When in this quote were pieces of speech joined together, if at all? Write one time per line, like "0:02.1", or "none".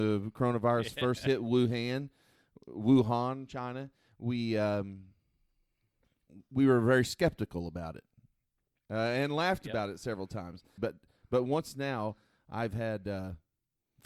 0:10.8